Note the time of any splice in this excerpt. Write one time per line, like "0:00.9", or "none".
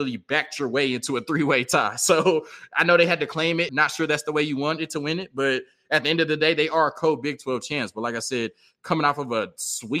0:03.7